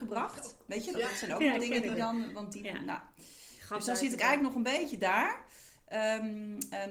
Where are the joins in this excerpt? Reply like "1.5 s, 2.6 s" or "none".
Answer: 0.9 s